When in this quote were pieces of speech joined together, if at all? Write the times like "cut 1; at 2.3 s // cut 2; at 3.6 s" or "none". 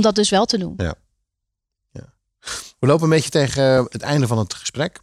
none

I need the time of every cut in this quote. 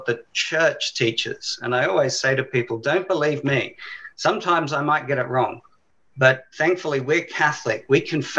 none

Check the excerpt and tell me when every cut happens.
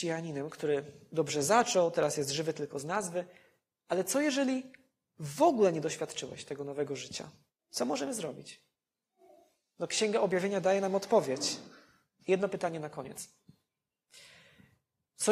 cut 1; at 7.5 s // cut 2; at 12.2 s

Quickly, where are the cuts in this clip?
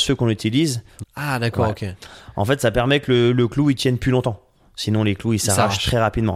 cut 1; at 1.0 s

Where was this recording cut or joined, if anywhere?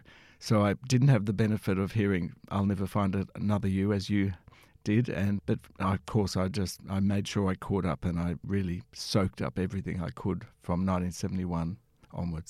cut 1; at 5.4 s // cut 2; at 8.4 s

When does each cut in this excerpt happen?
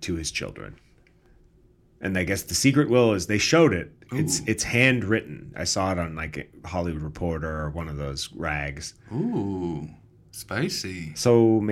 none

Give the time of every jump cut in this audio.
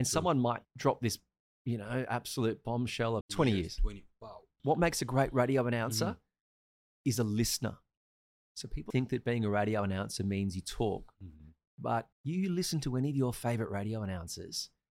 cut 1; at 3.2 s // cut 2; at 8.9 s // cut 3; at 12.1 s

